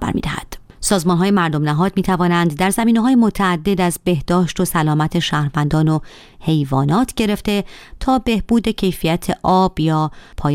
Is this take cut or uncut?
uncut